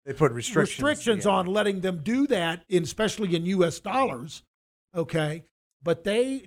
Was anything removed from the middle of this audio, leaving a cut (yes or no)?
no